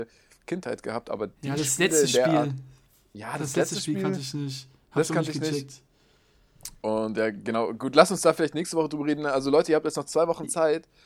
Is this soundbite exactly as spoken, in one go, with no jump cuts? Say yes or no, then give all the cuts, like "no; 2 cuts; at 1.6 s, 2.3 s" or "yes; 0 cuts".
yes; 0 cuts